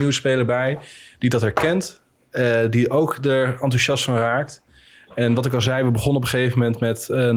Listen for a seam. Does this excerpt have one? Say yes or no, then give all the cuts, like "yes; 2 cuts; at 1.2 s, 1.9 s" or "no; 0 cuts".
no; 0 cuts